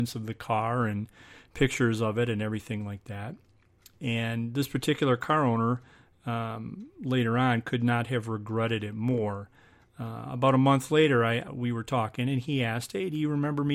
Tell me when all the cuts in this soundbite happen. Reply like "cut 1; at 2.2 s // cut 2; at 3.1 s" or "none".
cut 1; at 11.5 s